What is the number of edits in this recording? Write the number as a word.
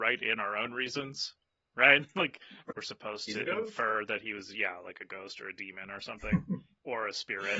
one